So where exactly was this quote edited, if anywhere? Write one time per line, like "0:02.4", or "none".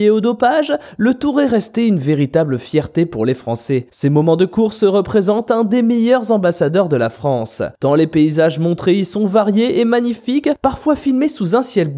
0:03.9